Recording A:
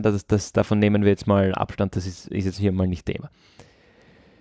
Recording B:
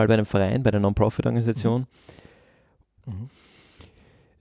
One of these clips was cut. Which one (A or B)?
B